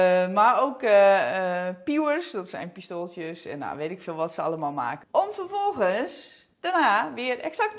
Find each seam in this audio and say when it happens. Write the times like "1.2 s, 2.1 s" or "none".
5.0 s